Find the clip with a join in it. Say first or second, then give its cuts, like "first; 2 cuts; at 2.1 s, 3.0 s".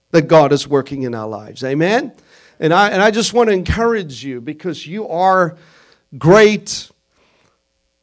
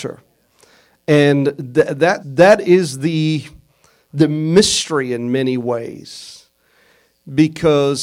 second; 1 cut; at 2.2 s